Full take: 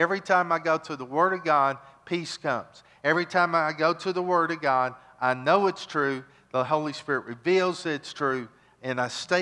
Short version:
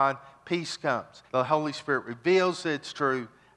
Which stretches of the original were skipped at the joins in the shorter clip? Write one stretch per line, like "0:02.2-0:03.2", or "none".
0:02.9-0:06.5